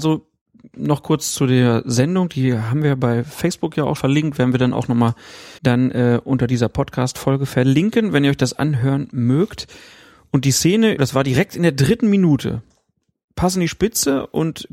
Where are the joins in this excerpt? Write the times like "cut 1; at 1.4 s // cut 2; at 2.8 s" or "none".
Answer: cut 1; at 4.0 s // cut 2; at 5.6 s // cut 3; at 11.0 s